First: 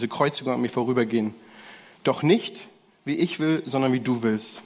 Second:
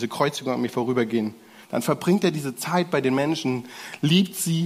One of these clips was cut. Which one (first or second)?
second